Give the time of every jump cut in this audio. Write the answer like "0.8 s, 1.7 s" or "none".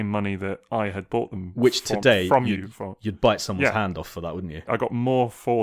none